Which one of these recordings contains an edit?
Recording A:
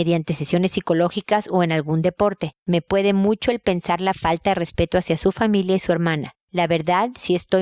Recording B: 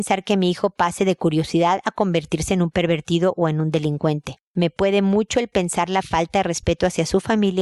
A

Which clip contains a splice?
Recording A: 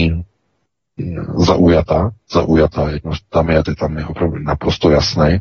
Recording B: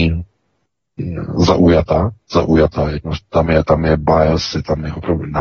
A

